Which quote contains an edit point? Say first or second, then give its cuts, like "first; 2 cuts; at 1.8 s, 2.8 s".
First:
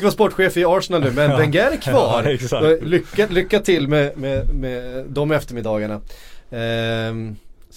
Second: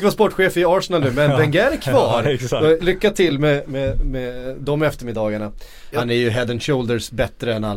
second; 2 cuts; at 2.8 s, 5.9 s